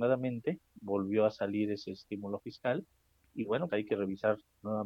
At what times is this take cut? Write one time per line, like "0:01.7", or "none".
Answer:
0:03.7